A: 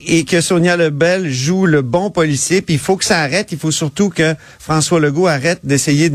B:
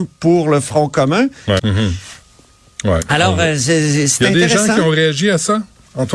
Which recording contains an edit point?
B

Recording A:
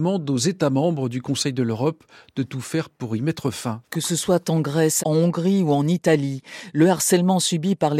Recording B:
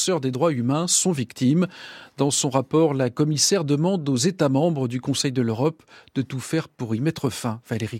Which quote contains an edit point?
A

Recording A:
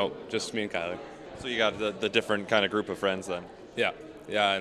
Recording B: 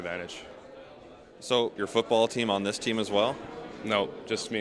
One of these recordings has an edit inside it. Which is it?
B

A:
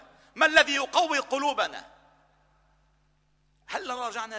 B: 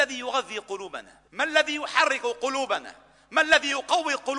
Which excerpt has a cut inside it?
B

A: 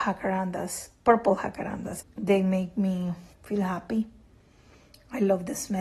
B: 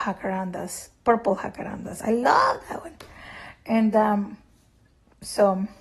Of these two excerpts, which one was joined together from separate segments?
A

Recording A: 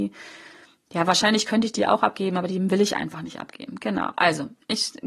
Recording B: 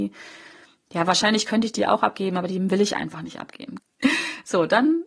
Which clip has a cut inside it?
B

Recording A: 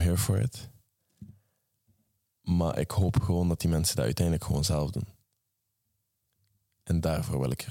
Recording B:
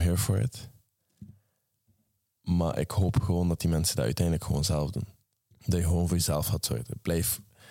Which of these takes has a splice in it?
B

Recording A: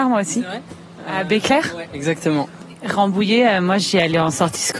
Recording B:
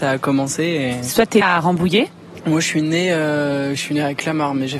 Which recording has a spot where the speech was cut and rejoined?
B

